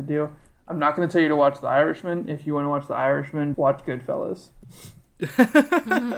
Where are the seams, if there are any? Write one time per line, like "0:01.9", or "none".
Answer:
0:03.5